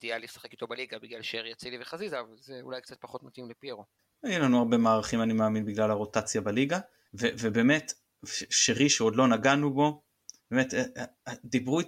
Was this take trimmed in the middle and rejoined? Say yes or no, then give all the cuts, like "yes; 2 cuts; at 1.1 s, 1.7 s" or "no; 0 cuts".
yes; 2 cuts; at 7.1 s, 10.4 s